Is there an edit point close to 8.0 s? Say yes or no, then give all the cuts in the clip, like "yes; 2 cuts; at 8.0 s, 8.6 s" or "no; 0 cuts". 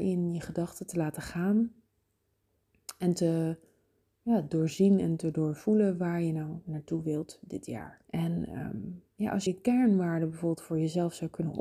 yes; 2 cuts; at 8.0 s, 9.5 s